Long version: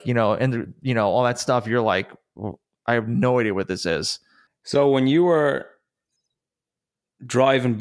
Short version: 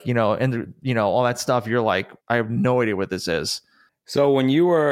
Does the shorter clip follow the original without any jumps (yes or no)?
no